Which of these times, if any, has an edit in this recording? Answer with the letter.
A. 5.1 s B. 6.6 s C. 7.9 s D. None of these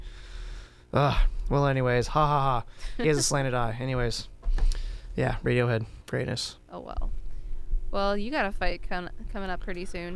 B